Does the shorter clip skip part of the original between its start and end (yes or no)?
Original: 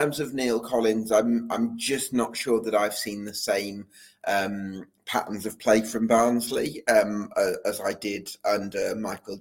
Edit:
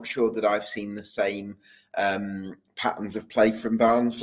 no